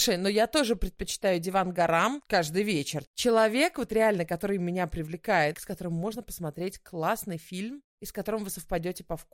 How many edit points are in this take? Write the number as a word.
two